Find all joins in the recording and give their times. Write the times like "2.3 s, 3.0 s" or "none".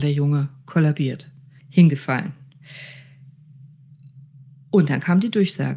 1.6 s